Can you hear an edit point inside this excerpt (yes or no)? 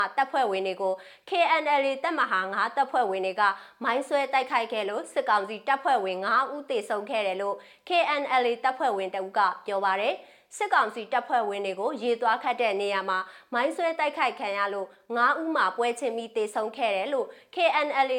no